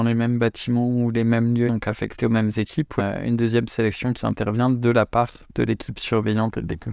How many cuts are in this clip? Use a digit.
2